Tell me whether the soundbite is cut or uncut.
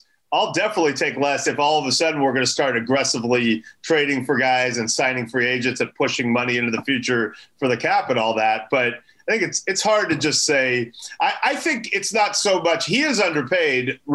uncut